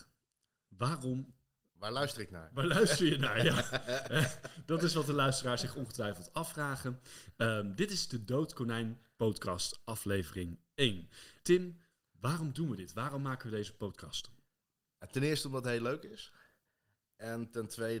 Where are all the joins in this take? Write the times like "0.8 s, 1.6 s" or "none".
11.4 s